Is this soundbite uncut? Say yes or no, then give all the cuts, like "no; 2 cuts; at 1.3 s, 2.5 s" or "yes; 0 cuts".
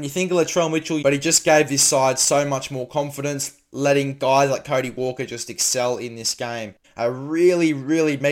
no; 2 cuts; at 1.0 s, 6.8 s